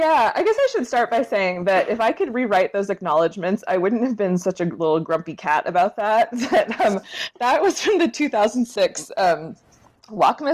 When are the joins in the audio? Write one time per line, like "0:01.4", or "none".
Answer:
none